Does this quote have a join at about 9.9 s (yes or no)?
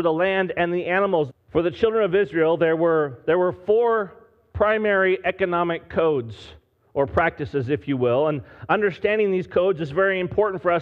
no